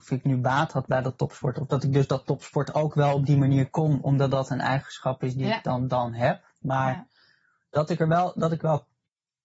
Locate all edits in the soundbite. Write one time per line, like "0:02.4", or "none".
none